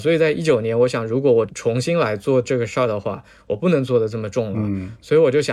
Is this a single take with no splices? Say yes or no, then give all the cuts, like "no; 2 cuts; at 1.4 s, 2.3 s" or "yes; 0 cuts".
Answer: no; 1 cut; at 1.5 s